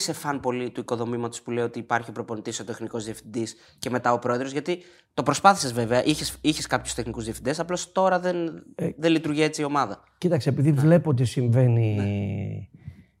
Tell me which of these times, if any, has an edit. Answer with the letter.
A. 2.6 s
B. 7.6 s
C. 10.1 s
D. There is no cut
D